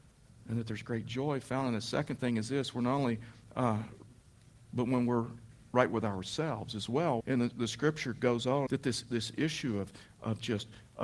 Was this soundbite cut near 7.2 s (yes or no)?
yes